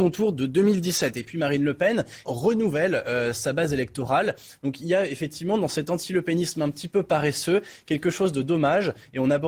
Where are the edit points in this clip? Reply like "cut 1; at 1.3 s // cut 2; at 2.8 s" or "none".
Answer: cut 1; at 2.2 s // cut 2; at 4.6 s

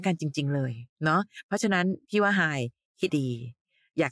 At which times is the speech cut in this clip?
cut 1; at 0.9 s // cut 2; at 3.1 s

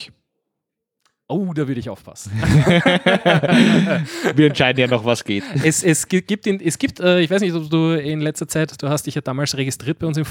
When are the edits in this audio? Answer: none

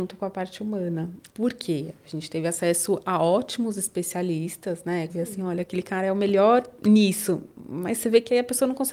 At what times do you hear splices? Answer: cut 1; at 1.3 s // cut 2; at 5.1 s

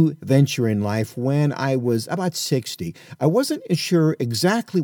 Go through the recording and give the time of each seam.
none

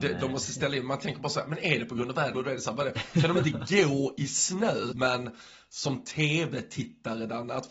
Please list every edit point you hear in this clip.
cut 1; at 2.3 s // cut 2; at 4.9 s

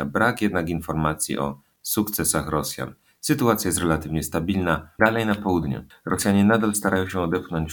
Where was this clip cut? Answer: cut 1; at 5.0 s

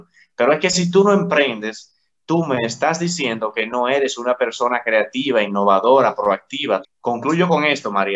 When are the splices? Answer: cut 1; at 6.8 s

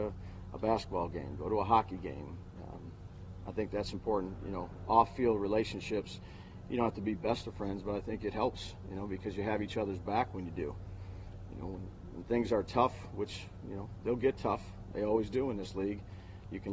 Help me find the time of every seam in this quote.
none

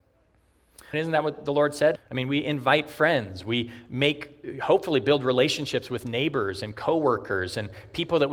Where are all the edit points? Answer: cut 1; at 0.9 s // cut 2; at 2.0 s

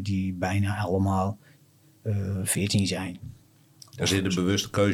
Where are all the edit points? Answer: none

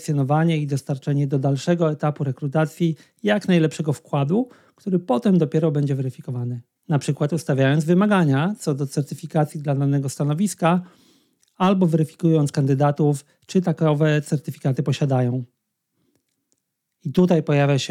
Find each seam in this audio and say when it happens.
cut 1; at 6.8 s

